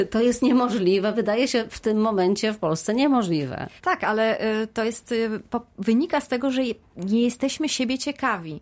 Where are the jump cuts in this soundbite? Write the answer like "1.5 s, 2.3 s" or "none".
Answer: 3.8 s